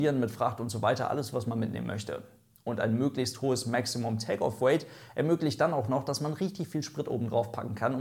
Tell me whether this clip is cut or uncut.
uncut